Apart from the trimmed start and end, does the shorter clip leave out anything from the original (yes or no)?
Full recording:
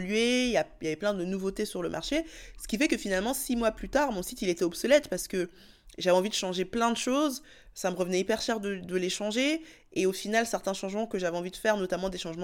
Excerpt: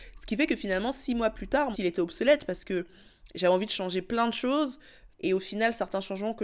yes